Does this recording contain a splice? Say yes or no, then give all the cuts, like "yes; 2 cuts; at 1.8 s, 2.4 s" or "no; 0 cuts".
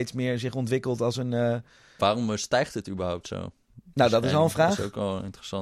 yes; 1 cut; at 2.0 s